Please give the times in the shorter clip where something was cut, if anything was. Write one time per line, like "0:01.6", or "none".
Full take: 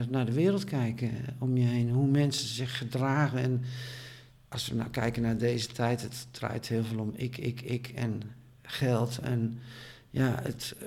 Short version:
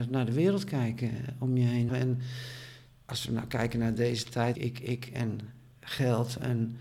0:01.9
0:04.5